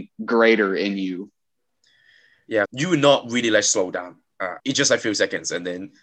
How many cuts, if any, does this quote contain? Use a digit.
2